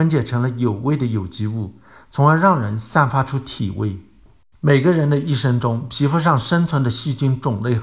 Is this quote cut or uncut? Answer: uncut